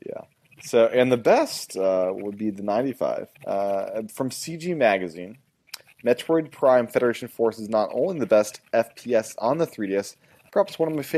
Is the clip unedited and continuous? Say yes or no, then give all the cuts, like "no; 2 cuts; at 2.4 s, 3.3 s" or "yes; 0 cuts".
no; 1 cut; at 3.3 s